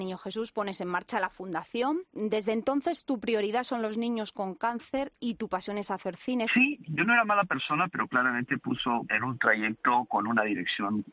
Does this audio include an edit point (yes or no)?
yes